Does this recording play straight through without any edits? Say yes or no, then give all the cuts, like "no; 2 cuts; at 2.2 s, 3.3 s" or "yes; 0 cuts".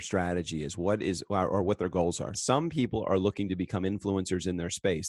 no; 1 cut; at 2.3 s